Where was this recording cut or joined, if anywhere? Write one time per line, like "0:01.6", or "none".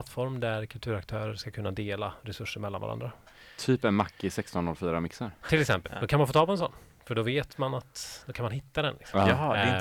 0:05.8

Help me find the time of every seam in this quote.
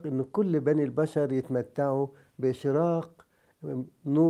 none

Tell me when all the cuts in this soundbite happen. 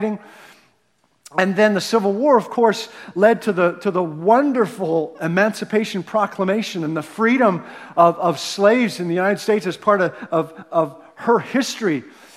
none

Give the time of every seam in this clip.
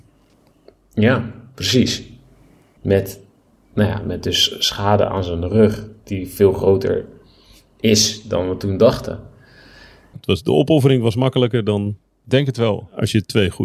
0:02.8
0:10.1

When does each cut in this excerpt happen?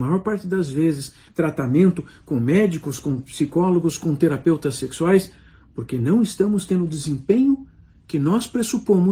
0:01.3

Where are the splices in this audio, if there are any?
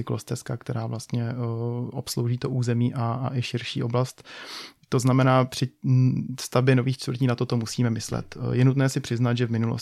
none

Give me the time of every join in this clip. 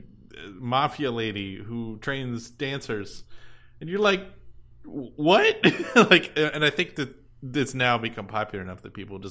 none

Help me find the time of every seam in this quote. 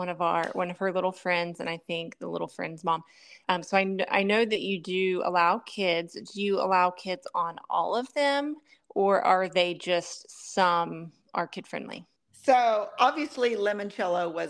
none

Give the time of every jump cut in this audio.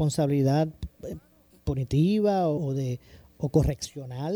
0:02.6

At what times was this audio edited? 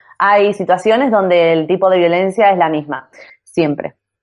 0:03.3

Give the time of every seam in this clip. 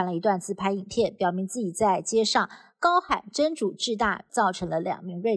0:04.3

